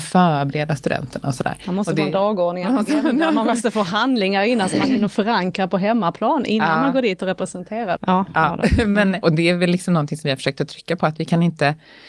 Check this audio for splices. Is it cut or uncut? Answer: cut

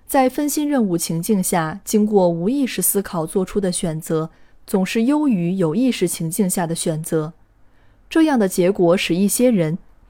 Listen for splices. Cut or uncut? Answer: uncut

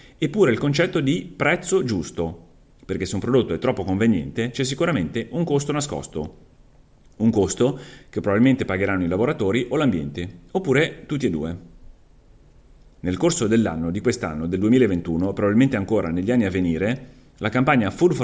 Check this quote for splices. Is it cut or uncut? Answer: uncut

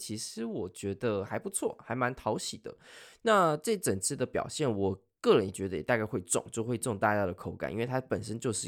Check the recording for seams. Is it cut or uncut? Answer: uncut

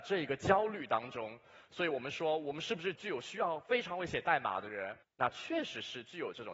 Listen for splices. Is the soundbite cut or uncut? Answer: cut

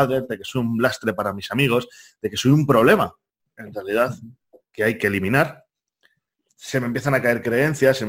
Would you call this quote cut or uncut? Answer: cut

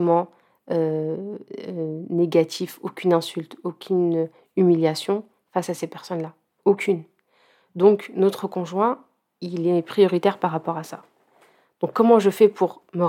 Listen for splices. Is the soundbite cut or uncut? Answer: uncut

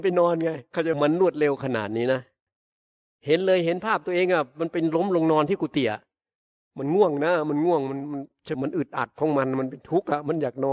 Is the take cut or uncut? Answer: cut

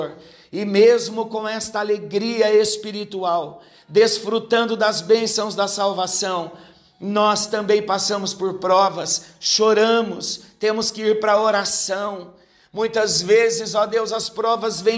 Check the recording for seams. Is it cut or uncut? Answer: uncut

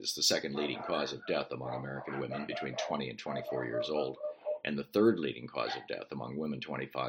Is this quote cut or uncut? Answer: uncut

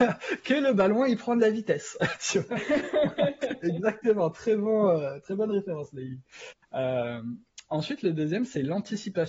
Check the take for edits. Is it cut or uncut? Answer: uncut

